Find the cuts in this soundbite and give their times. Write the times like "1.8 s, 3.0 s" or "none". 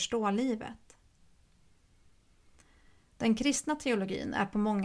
none